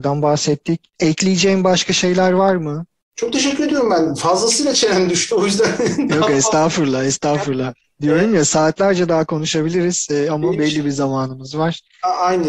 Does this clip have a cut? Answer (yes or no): no